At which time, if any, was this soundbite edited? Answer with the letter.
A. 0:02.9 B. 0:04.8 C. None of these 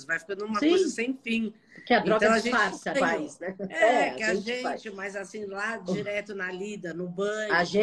A